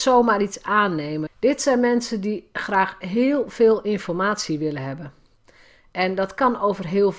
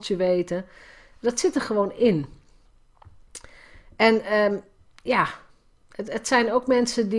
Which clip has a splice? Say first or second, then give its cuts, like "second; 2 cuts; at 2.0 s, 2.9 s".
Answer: first; 1 cut; at 1.3 s